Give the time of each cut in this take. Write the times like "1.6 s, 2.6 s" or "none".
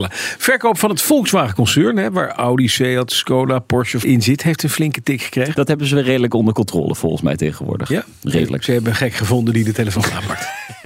4.0 s, 5.5 s